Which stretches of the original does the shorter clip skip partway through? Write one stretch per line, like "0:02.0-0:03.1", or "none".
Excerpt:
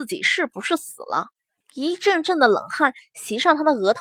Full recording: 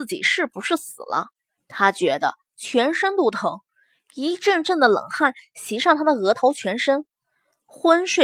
0:01.6-0:04.0